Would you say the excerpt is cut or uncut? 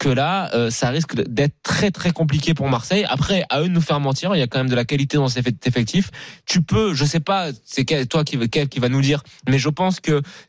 uncut